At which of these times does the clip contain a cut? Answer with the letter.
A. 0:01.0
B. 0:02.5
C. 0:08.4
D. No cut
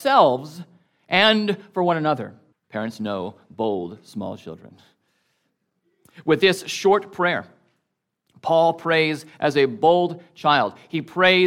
B